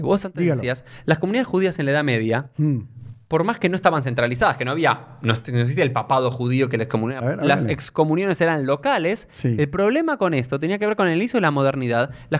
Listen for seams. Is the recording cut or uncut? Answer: cut